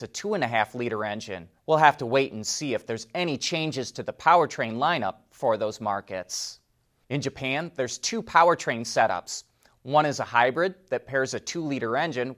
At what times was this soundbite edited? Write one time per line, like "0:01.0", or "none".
0:01.6
0:07.0